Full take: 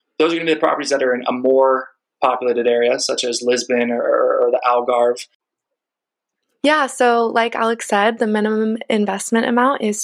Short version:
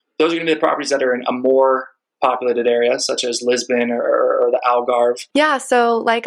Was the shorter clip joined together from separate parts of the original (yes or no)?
yes